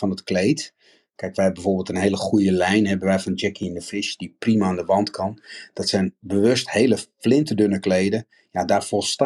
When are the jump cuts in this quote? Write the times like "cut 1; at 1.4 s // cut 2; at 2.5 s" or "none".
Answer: none

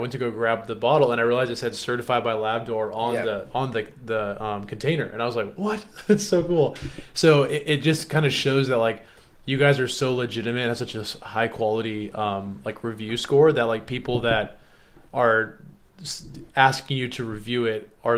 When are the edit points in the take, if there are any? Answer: none

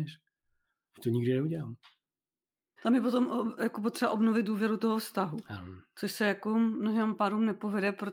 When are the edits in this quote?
cut 1; at 2.8 s

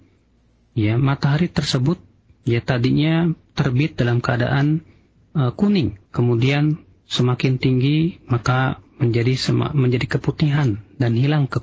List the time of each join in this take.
cut 1; at 6.1 s

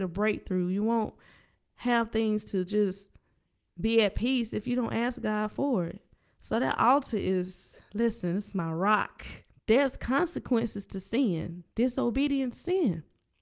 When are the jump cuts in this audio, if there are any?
cut 1; at 9.5 s

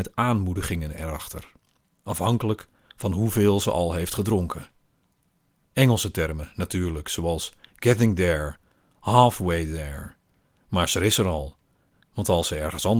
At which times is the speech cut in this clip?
none

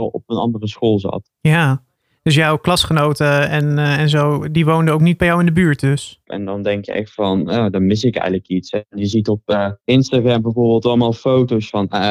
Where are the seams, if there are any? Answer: cut 1; at 6.2 s // cut 2; at 9.8 s

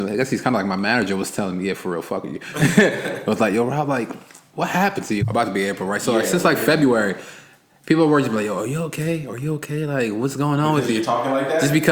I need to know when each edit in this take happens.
cut 1; at 5.2 s

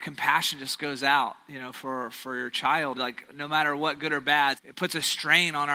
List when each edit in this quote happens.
cut 1; at 2.9 s // cut 2; at 4.5 s

